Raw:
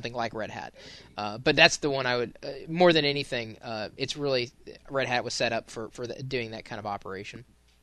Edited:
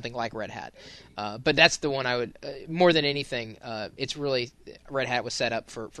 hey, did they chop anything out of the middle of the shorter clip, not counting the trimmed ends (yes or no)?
no